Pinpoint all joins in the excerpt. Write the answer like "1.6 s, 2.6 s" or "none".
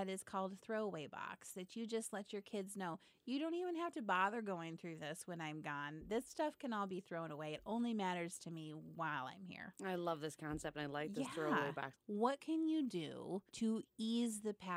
11.9 s, 13.5 s